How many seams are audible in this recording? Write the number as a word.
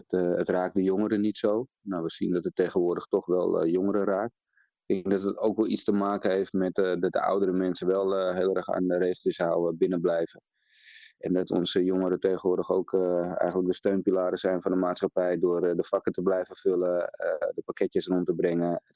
zero